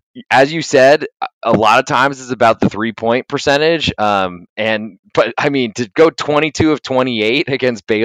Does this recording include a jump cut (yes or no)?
no